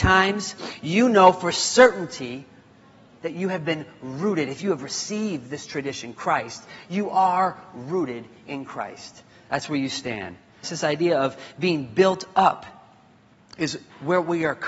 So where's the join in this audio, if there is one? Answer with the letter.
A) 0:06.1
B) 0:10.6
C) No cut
B